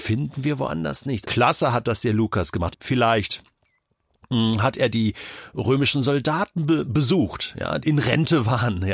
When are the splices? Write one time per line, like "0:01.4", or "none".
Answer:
0:01.2
0:02.7
0:07.8